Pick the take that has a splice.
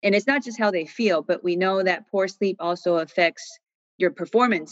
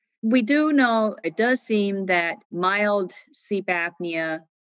second; 2 cuts; at 1.2 s, 2.4 s

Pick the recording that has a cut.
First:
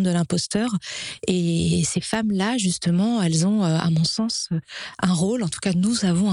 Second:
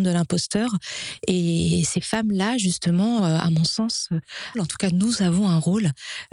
second; 2 cuts; at 3.2 s, 4.5 s

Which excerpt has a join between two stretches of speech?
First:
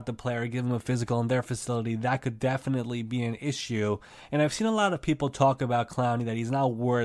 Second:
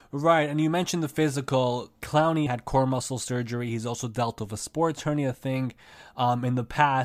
second; 1 cut; at 2.5 s

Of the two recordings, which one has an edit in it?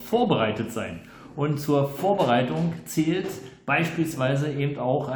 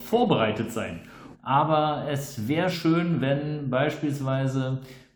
second; 2 cuts; at 1.3 s, 2.7 s

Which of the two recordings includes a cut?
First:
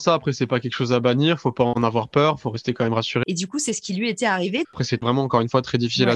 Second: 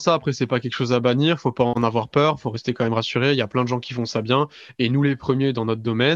first; 2 cuts; at 3.2 s, 4.6 s

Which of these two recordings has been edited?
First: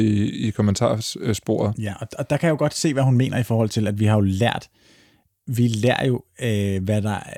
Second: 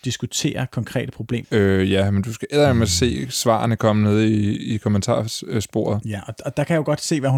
second; 1 cut; at 1.4 s

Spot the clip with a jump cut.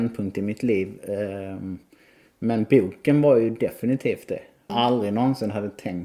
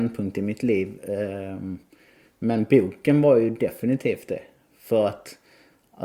first; 1 cut; at 4.7 s

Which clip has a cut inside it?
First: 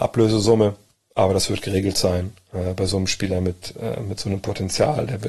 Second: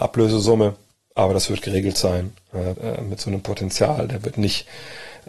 second; 1 cut; at 2.7 s

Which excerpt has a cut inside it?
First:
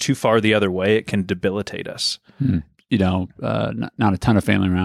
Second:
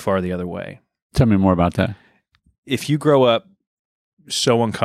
first; 1 cut; at 2.8 s

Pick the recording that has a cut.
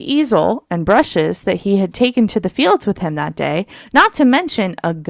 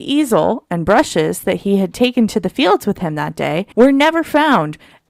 second; 1 cut; at 3.7 s

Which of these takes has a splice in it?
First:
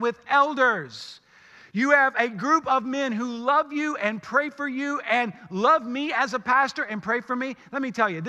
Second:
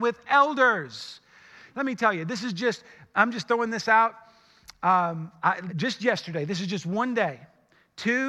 second; 2 cuts; at 1.7 s, 5.7 s

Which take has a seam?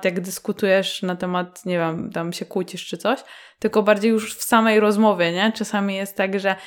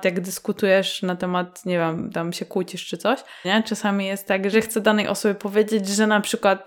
second; 2 cuts; at 3.4 s, 4.5 s

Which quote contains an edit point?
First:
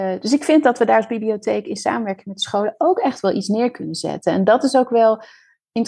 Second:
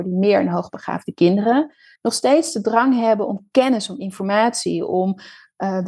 second; 1 cut; at 2.0 s

